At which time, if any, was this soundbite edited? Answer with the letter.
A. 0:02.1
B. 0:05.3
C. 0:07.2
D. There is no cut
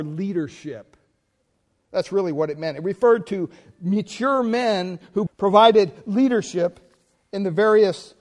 B